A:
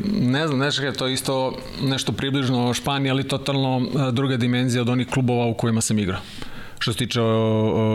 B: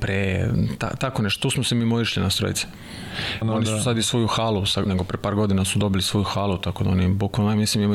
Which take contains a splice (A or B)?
B